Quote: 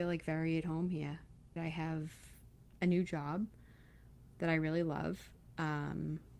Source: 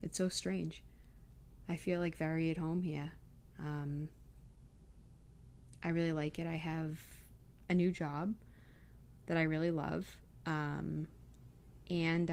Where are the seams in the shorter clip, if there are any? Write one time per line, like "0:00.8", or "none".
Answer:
0:01.6